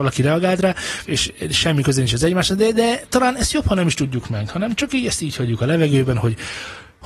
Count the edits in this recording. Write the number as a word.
one